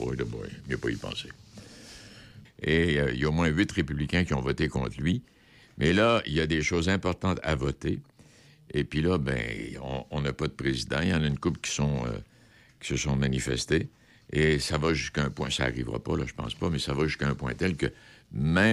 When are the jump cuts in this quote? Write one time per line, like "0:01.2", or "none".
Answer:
0:02.5